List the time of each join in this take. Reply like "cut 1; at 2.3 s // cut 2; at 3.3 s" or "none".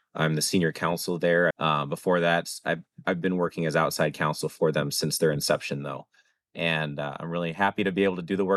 cut 1; at 1.5 s